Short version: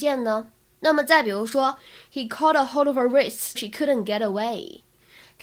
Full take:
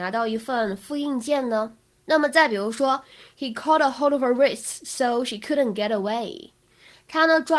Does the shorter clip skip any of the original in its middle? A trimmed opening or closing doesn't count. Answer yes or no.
yes